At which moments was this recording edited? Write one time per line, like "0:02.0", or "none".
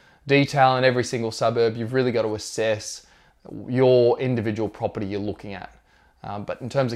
none